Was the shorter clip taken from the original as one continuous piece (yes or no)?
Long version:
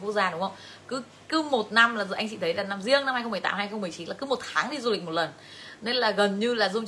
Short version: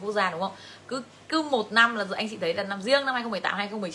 yes